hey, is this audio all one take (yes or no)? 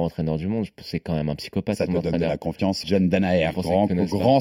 no